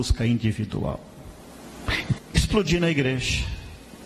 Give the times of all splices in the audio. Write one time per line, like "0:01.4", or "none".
0:02.2